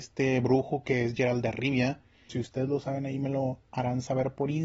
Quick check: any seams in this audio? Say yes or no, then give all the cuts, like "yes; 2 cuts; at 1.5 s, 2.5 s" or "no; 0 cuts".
yes; 1 cut; at 2.3 s